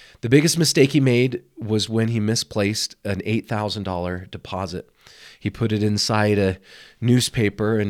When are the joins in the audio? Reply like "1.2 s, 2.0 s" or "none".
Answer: none